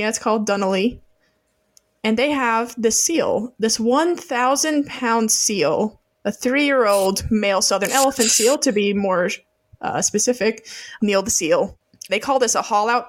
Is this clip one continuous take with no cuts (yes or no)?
no